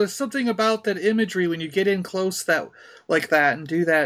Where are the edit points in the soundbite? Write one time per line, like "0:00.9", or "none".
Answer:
none